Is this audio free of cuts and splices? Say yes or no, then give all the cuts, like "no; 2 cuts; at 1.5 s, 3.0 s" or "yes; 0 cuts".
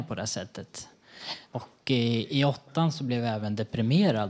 no; 1 cut; at 1.4 s